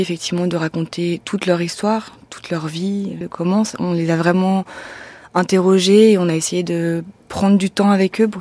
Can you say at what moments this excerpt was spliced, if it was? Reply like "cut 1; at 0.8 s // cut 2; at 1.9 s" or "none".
cut 1; at 3.2 s